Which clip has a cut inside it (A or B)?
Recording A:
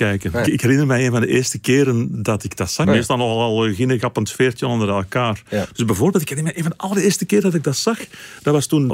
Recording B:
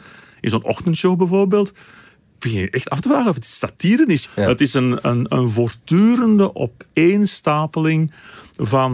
A